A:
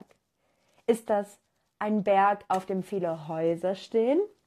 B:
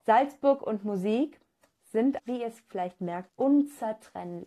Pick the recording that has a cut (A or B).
B